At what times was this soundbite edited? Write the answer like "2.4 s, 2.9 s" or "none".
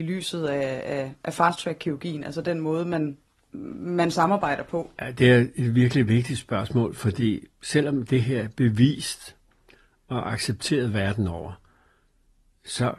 none